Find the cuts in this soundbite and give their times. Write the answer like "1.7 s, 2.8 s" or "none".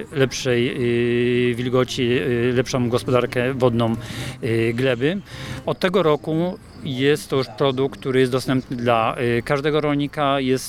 5.6 s